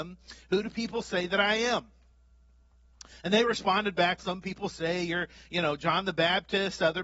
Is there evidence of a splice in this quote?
yes; 1 cut; at 4.2 s

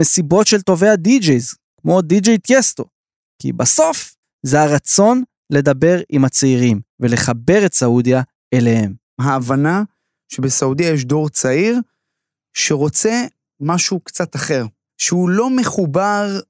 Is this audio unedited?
no; 1 cut; at 4.2 s

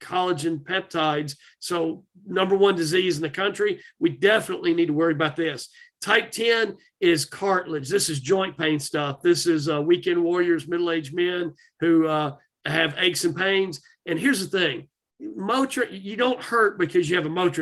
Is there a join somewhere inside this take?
no; 0 cuts

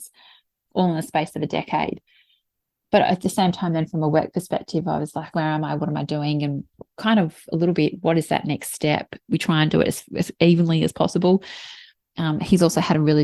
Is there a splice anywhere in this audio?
yes; 2 cuts; at 5.3 s, 9.2 s

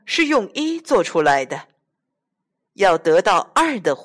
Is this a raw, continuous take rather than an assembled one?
yes; 0 cuts

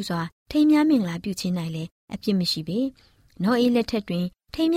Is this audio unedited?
yes; 0 cuts

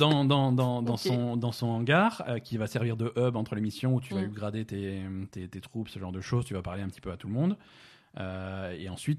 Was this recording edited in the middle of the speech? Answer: no; 0 cuts

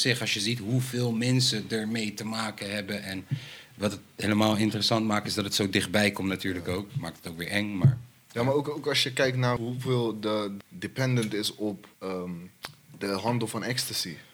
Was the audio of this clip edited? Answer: yes; 3 cuts; at 9.6 s, 10.6 s, 11.9 s

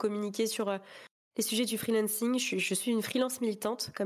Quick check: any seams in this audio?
no; 0 cuts

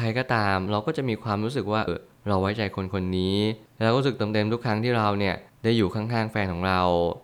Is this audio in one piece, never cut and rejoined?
no; 1 cut; at 1.9 s

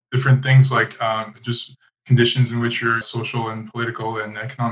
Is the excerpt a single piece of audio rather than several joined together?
no; 1 cut; at 3.0 s

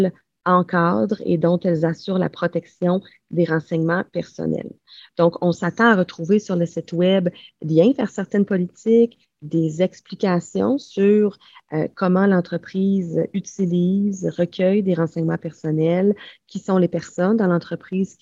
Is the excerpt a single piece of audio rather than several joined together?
no; 1 cut; at 7.5 s

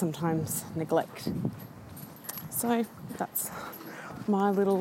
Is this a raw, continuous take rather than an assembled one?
yes; 0 cuts

